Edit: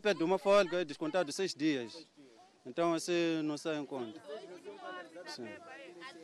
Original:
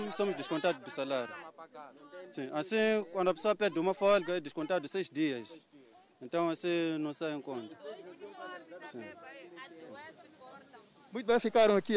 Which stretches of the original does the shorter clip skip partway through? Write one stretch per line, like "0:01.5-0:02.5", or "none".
none